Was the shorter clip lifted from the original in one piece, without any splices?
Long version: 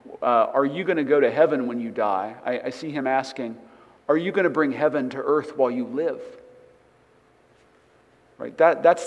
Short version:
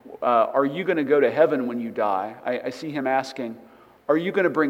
yes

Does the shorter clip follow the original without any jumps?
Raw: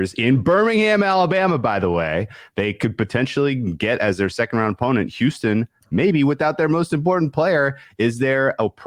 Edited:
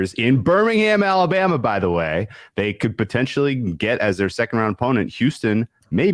yes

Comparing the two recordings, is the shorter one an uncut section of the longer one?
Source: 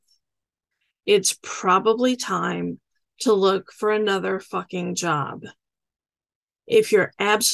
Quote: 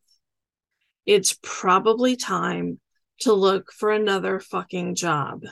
yes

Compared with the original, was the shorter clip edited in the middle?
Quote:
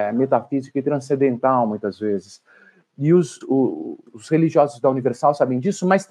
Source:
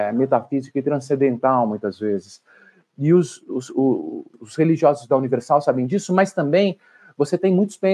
yes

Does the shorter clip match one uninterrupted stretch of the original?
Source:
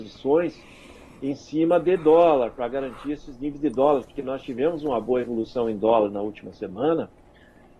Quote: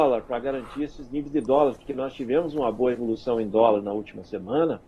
yes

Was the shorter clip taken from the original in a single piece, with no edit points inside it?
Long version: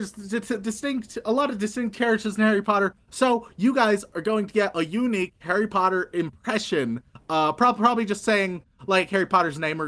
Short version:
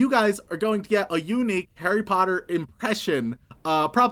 yes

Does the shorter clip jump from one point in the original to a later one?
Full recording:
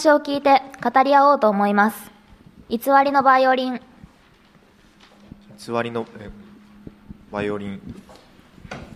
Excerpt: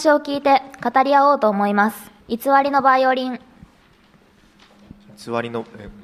yes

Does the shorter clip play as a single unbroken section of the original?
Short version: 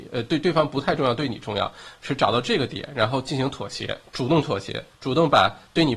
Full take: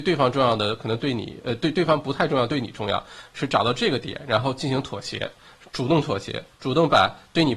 no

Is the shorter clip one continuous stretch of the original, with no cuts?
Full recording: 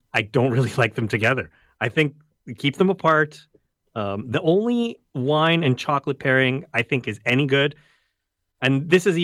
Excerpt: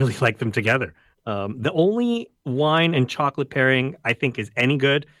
no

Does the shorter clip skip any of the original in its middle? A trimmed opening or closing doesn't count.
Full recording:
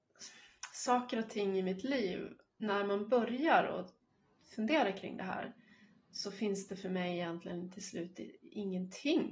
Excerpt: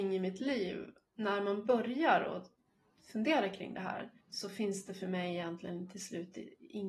yes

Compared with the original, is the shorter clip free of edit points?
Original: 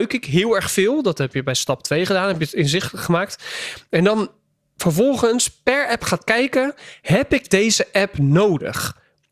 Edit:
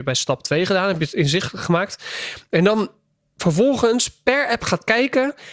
yes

